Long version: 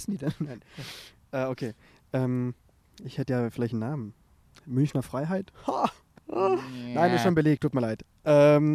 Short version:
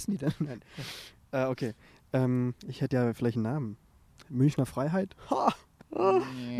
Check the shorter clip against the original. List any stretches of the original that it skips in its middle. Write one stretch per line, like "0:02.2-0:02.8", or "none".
0:02.6-0:02.9